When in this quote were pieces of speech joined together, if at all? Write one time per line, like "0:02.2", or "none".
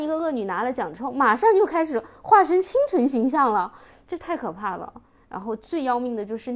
0:05.2